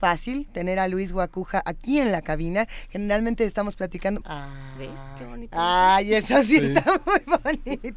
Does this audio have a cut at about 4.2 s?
yes; 1 cut; at 4.2 s

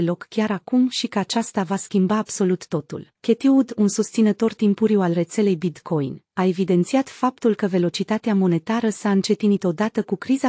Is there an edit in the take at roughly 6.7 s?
no; 1 cut; at 3.1 s

